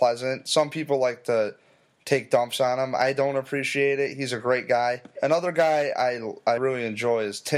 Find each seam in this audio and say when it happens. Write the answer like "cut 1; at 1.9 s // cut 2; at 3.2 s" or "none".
cut 1; at 5.2 s // cut 2; at 6.6 s